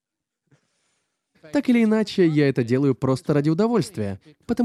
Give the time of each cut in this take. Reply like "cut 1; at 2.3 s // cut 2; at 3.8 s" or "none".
cut 1; at 1.3 s